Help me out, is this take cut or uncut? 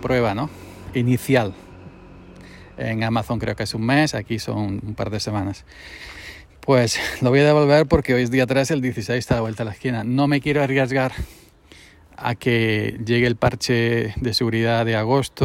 uncut